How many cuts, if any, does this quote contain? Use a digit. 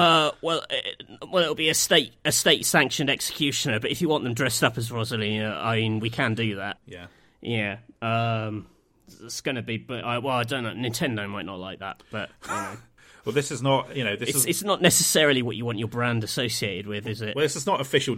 0